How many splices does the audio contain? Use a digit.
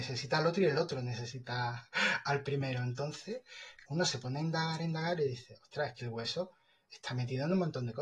1